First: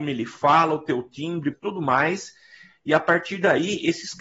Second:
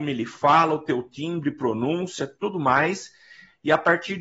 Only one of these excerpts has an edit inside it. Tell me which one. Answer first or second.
first